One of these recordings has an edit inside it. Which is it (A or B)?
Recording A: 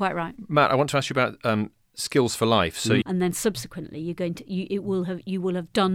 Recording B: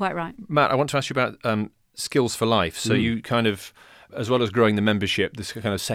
A